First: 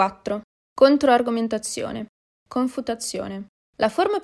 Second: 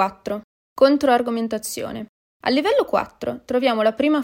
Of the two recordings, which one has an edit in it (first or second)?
first